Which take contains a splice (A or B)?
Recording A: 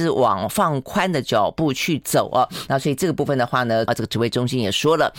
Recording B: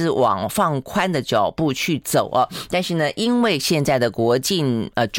A